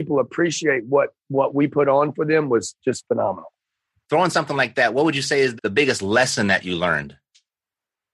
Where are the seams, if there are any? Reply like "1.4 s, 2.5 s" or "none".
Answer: 4.0 s, 5.6 s